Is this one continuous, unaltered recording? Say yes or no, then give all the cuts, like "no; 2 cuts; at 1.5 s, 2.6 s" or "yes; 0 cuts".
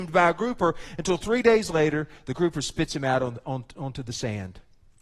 yes; 0 cuts